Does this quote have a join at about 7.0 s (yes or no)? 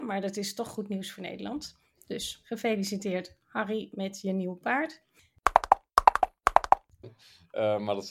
yes